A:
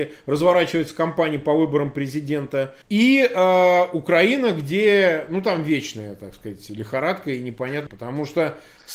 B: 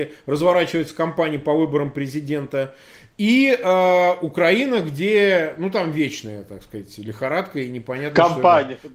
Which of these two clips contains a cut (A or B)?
A